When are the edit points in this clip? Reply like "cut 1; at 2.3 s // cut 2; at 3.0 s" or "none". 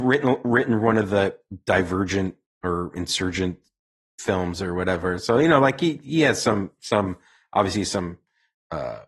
none